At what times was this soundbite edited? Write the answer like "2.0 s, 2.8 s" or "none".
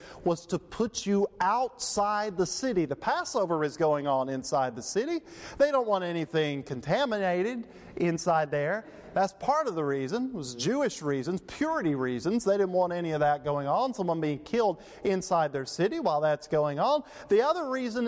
none